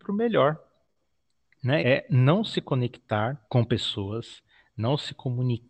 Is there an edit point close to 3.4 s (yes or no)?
yes